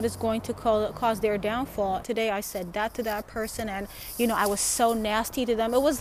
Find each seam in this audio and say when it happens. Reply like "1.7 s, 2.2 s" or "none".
2.0 s